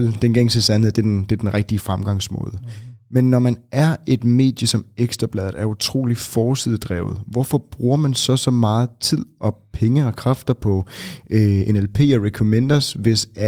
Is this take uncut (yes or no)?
yes